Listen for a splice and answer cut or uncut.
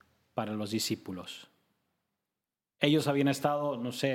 cut